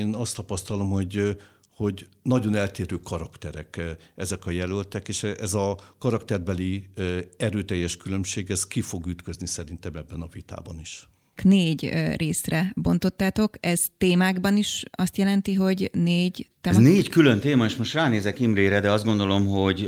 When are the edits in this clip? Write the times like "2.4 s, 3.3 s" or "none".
11.4 s